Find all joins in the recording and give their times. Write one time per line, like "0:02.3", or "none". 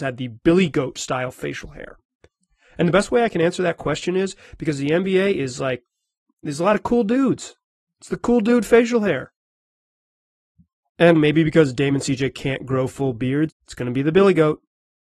0:11.1
0:13.5